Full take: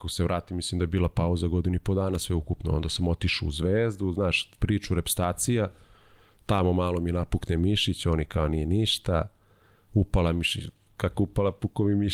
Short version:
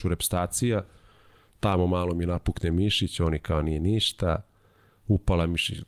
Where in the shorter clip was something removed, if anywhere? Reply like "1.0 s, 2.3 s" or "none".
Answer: none